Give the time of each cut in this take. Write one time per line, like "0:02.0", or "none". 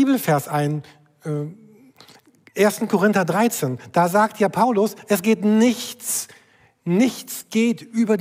none